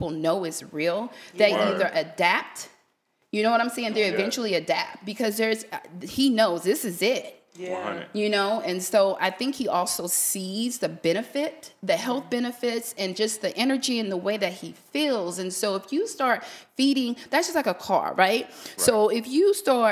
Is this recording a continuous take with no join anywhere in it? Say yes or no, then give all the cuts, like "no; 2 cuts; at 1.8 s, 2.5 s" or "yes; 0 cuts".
yes; 0 cuts